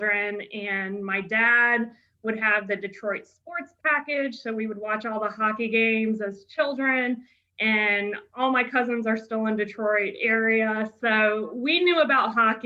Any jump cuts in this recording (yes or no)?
no